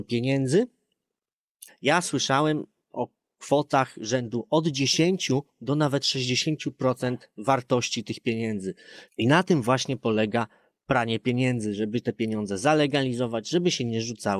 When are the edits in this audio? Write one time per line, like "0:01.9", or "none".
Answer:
0:01.7
0:09.1